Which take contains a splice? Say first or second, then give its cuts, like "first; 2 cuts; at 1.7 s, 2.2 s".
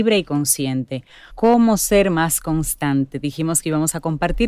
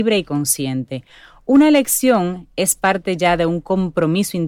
first; 1 cut; at 1.3 s